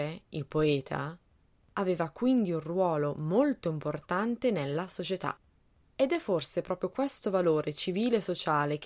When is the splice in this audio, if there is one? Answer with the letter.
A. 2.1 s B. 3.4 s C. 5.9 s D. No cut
D